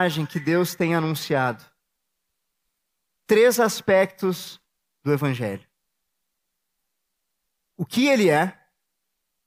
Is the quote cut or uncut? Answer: cut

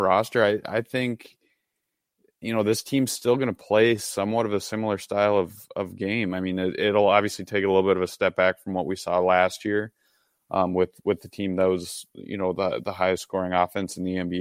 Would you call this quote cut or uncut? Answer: uncut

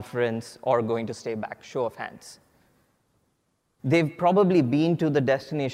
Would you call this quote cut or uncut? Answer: cut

